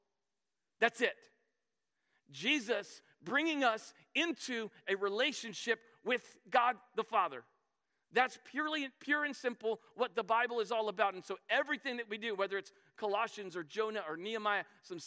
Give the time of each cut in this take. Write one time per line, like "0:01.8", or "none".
none